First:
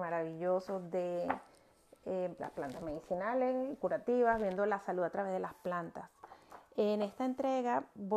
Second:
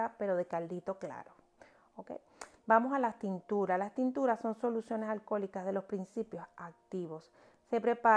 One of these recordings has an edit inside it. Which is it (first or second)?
first